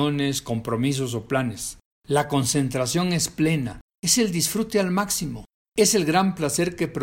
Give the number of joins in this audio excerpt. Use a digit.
1